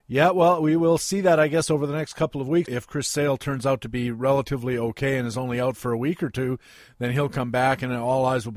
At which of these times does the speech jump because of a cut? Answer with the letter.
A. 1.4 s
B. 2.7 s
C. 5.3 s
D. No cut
B